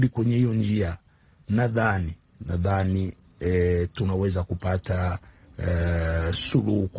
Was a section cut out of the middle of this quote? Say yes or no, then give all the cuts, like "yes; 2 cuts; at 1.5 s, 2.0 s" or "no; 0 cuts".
no; 0 cuts